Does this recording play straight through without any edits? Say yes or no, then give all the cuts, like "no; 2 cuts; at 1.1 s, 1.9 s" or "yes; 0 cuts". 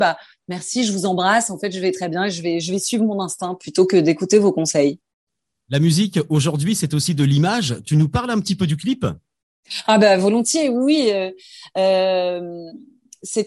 yes; 0 cuts